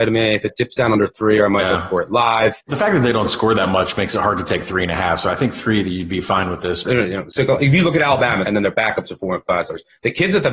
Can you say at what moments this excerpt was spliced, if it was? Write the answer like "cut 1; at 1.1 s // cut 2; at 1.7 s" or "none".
cut 1; at 6.8 s // cut 2; at 8.4 s